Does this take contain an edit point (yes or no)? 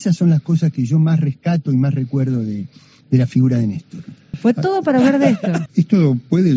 yes